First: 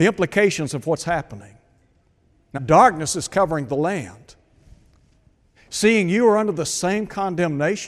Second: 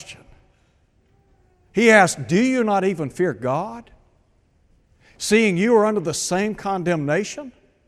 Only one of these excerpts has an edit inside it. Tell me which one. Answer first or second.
first